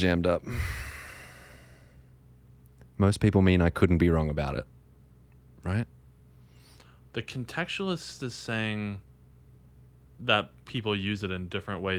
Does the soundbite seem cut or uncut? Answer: uncut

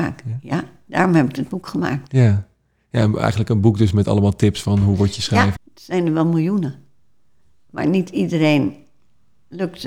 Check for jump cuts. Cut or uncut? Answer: cut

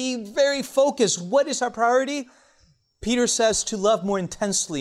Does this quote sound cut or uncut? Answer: uncut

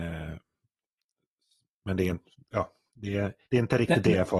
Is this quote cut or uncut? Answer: cut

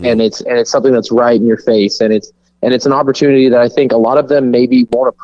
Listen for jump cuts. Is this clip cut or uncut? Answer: uncut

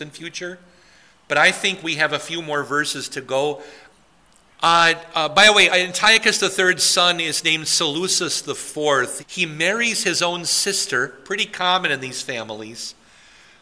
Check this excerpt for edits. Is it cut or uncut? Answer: cut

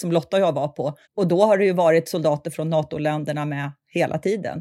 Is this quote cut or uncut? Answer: cut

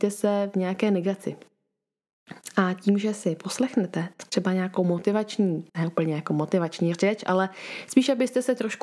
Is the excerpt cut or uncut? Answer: cut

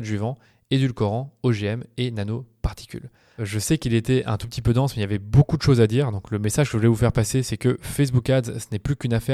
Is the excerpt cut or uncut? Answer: cut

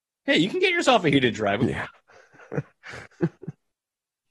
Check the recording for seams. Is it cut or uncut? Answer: cut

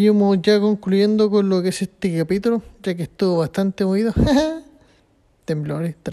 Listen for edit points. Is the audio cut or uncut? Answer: uncut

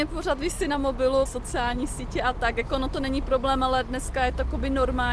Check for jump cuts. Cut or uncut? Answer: cut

